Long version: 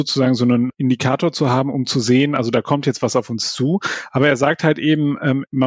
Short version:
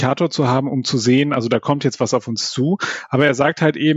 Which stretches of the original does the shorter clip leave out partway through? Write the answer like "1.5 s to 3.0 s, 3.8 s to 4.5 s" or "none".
none